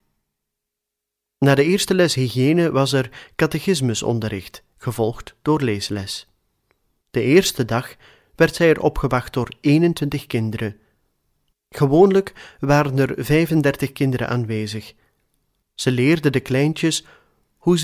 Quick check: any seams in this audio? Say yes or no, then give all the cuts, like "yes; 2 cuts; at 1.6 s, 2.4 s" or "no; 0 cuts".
yes; 3 cuts; at 7.0 s, 11.5 s, 15.6 s